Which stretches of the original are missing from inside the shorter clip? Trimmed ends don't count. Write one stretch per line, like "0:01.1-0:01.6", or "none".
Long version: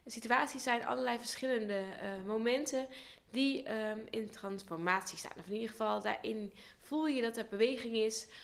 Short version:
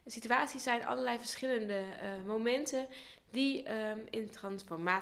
none